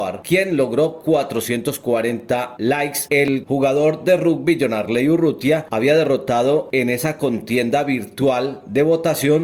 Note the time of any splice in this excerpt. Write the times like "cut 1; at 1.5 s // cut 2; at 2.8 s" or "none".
cut 1; at 3.1 s